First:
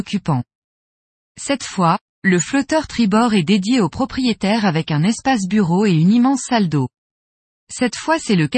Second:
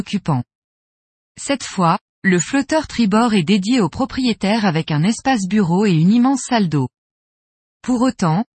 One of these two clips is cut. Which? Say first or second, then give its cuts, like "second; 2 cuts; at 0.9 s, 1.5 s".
first; 1 cut; at 7.6 s